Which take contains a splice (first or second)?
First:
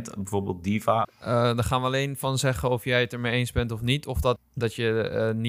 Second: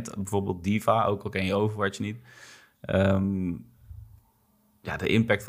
first